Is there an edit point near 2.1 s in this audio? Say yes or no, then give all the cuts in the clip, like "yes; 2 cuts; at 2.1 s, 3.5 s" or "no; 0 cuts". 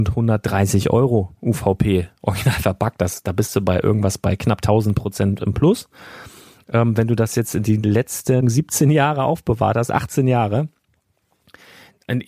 no; 1 cut; at 8.4 s